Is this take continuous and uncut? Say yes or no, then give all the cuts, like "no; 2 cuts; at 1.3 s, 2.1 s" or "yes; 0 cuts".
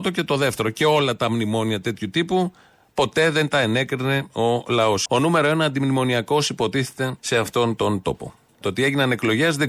no; 3 cuts; at 5.1 s, 7.2 s, 8.6 s